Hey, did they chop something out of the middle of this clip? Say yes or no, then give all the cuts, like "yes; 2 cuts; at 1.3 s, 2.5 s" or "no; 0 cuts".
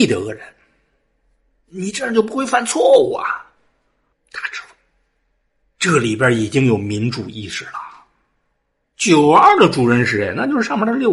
yes; 2 cuts; at 4.1 s, 8.8 s